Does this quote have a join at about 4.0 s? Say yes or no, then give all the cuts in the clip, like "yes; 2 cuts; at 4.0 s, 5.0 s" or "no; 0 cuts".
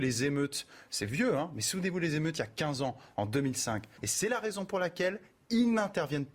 yes; 1 cut; at 4.0 s